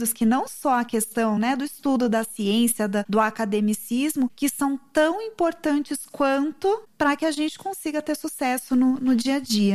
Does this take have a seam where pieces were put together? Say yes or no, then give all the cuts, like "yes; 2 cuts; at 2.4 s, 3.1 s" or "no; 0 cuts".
no; 0 cuts